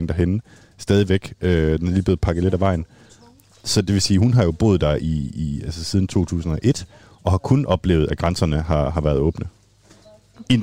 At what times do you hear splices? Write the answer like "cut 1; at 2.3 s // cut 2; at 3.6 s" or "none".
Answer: none

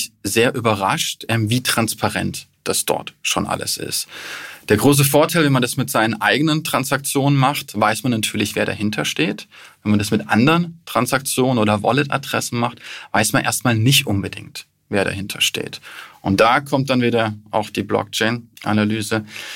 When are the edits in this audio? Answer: none

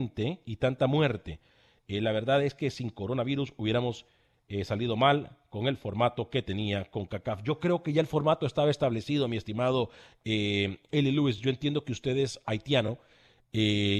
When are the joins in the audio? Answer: none

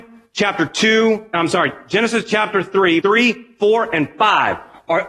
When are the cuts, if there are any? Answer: cut 1; at 3.0 s

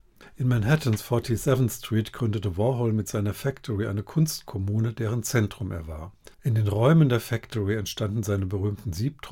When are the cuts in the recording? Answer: cut 1; at 6.3 s

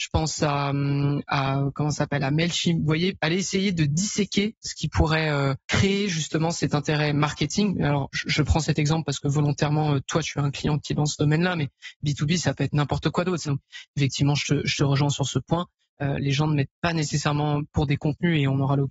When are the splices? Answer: cut 1; at 13.4 s // cut 2; at 17.7 s

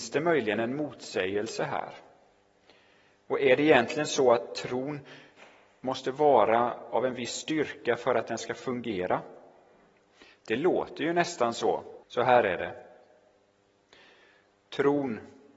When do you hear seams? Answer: cut 1; at 12.0 s

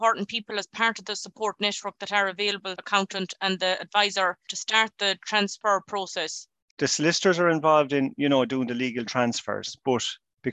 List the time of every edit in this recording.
cut 1; at 2.8 s

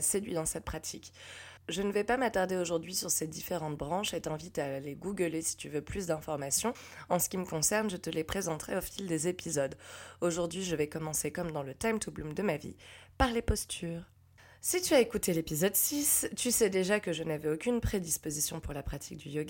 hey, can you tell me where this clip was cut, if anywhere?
none

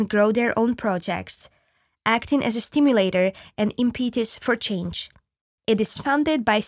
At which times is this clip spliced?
cut 1; at 5.6 s

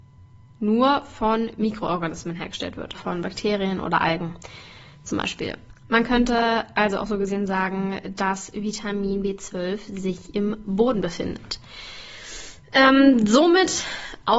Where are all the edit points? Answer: cut 1; at 2.9 s

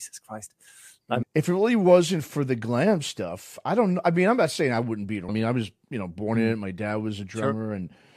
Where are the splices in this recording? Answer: cut 1; at 1.2 s // cut 2; at 5.3 s

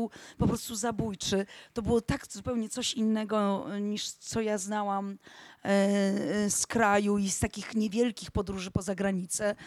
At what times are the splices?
none

